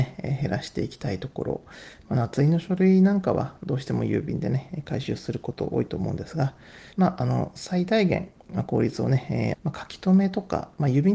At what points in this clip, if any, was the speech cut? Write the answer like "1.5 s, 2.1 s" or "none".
6.9 s, 9.5 s